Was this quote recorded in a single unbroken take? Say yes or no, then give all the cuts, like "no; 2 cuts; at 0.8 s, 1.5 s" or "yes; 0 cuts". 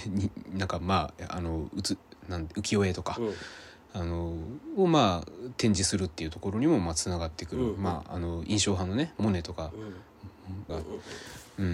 no; 1 cut; at 10.7 s